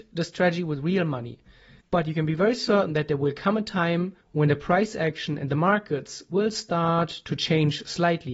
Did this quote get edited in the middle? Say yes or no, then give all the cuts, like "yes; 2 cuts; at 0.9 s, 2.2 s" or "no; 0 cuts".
yes; 2 cuts; at 1.8 s, 4.2 s